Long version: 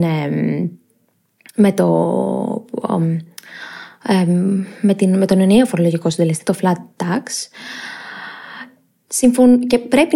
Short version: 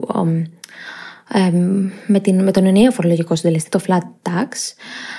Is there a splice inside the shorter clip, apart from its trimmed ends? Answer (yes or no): no